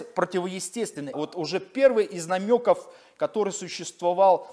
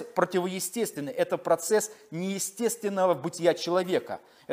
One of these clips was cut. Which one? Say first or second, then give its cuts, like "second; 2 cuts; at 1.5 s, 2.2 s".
first; 1 cut; at 1.1 s